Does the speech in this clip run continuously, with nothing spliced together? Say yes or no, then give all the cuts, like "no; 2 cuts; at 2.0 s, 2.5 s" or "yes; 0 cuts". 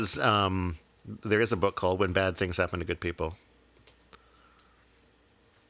yes; 0 cuts